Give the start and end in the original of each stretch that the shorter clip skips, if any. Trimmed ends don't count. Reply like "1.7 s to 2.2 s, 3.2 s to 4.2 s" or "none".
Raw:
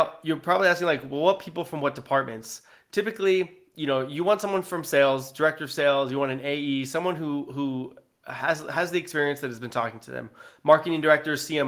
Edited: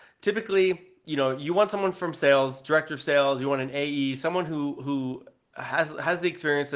none